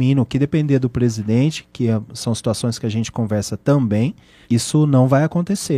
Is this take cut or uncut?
cut